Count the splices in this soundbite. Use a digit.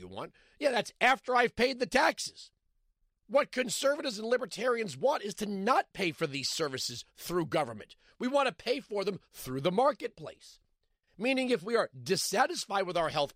0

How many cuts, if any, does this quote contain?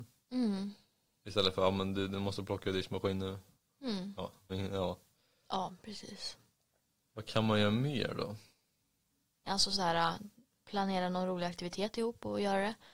2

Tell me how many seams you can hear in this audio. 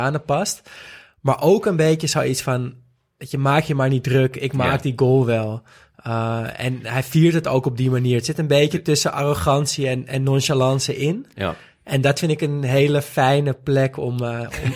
0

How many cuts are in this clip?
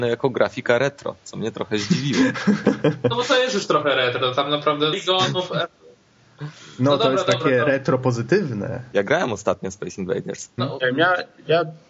2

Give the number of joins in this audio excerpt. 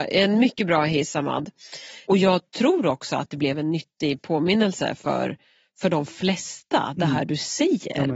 0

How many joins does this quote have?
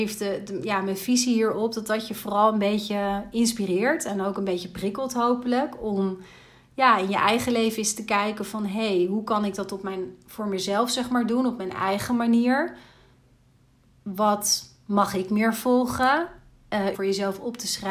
1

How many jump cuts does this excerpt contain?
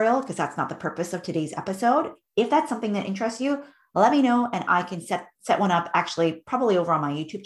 0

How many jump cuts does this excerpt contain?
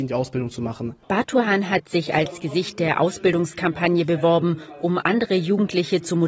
1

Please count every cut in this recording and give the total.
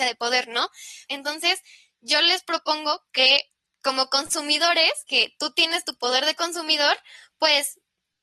1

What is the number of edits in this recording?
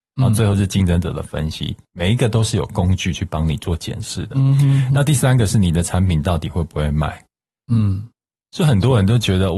0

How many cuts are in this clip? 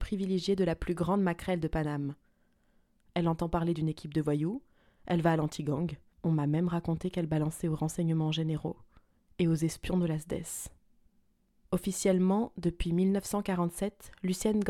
2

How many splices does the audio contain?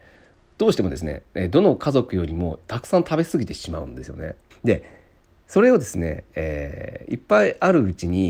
1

